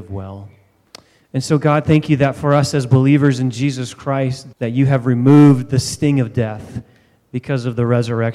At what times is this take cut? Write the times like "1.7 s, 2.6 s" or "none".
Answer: 4.5 s